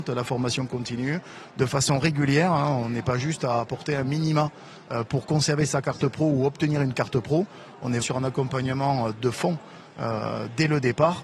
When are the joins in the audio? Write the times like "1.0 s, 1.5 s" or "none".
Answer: 8.0 s